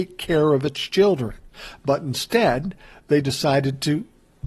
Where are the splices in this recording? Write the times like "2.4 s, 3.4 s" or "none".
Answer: none